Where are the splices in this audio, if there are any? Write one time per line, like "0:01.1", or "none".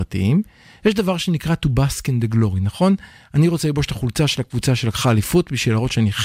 none